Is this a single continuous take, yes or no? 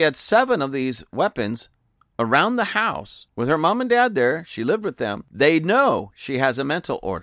yes